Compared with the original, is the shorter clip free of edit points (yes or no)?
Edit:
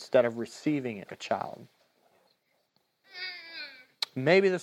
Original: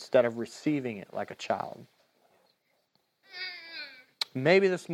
no